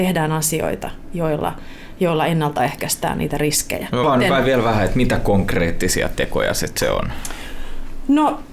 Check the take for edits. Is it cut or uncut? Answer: cut